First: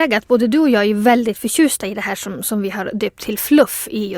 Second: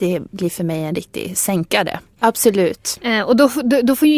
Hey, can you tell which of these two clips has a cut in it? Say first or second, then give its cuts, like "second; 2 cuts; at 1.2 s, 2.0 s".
second; 1 cut; at 2.1 s